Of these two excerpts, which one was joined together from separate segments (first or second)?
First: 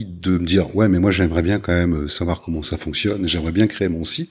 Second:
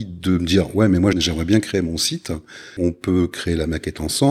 second